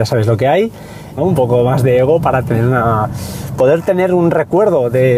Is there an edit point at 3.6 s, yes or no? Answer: no